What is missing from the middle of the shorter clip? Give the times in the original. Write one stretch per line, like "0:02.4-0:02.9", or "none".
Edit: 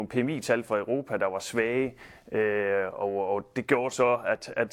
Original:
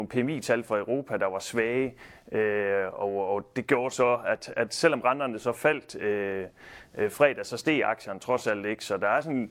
none